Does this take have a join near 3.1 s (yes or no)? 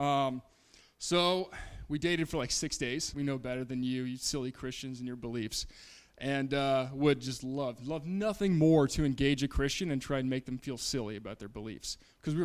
yes